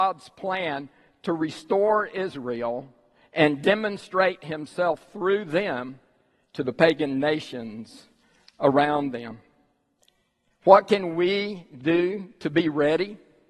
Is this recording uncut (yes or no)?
yes